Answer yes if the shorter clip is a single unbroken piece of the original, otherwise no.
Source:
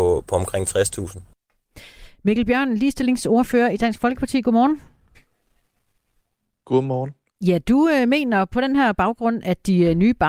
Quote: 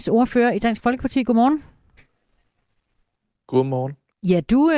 yes